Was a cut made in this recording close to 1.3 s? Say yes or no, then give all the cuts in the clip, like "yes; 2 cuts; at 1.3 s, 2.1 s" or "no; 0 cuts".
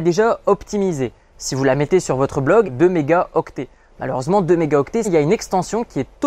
no; 2 cuts; at 2.6 s, 5.0 s